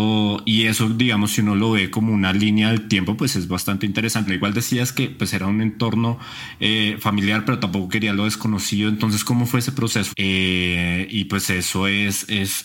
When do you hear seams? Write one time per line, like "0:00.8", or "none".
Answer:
0:04.3
0:10.1